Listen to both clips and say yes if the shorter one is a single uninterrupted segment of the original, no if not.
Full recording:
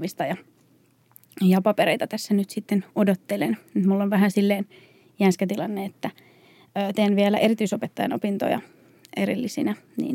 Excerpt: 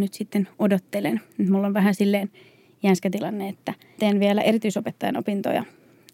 no